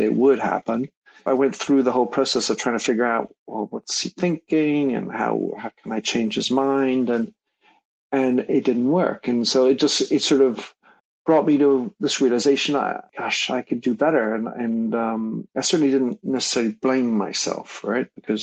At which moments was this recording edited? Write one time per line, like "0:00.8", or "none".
0:01.3